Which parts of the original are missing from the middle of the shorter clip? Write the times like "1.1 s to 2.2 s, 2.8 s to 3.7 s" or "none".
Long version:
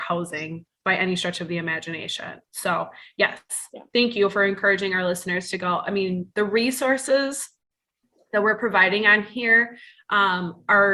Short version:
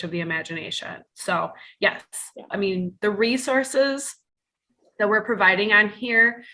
3.9 s to 5.8 s

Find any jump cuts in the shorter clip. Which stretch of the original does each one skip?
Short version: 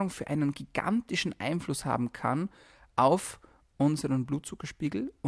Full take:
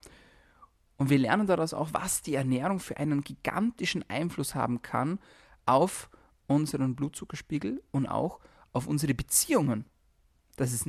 none

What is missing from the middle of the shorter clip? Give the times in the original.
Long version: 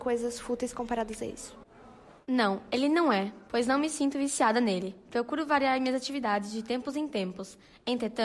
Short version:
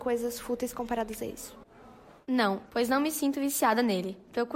2.7 s to 3.4 s

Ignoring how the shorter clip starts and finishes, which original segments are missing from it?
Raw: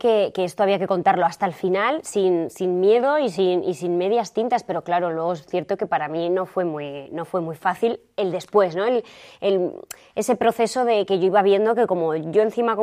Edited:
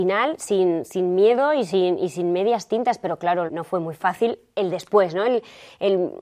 5.1 s to 7.1 s

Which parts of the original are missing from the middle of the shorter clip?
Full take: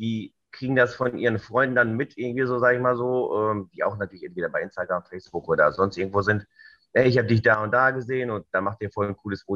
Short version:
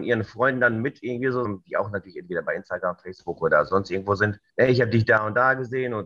2.6 s to 3.5 s, 6.6 s to 6.9 s

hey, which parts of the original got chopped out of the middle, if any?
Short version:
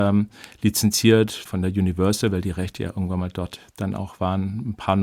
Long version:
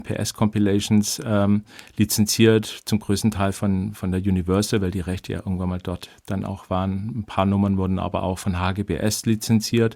2.8 s to 3.9 s

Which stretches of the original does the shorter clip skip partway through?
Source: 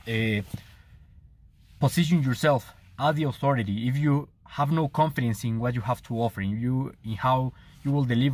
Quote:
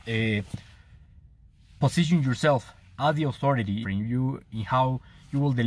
3.8 s to 6.3 s

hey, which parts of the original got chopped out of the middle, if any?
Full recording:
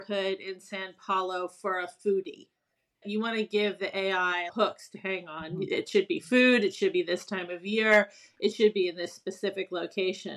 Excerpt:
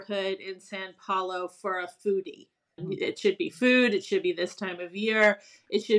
2.8 s to 5.5 s

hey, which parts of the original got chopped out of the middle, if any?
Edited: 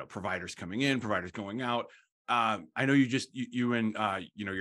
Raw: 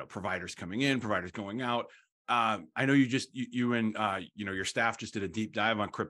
none

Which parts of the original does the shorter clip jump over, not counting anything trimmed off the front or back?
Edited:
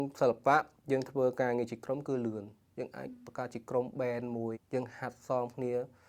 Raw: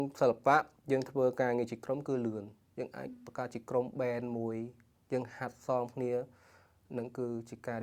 4.5 s to 4.9 s

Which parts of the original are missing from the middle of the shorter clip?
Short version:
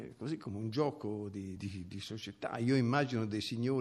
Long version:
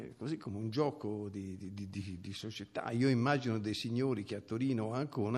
1.6 s to 1.9 s

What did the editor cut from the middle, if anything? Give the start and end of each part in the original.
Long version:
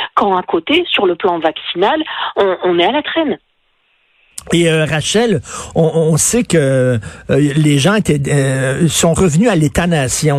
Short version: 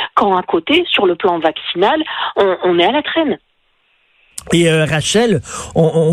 none

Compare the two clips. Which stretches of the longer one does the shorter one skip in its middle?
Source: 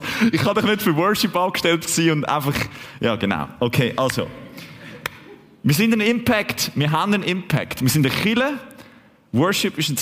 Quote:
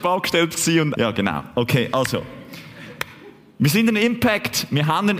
2.3 s to 3.0 s

